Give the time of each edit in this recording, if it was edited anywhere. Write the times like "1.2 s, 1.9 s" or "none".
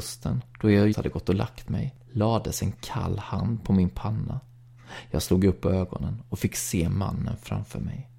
0.9 s